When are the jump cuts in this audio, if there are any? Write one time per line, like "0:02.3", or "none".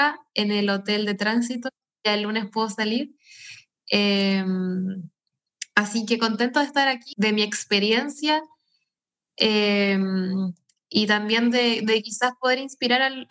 0:07.1